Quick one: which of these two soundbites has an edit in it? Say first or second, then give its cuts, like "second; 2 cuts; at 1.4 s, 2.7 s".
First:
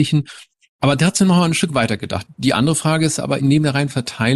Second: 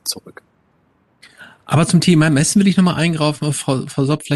first; 2 cuts; at 2.3 s, 3.4 s